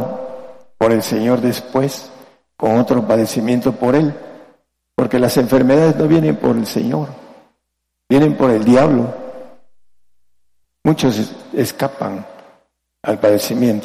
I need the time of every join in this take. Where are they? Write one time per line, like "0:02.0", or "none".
0:10.6